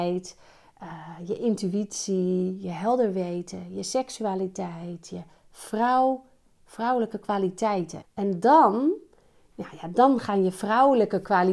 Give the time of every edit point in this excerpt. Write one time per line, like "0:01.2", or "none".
0:08.0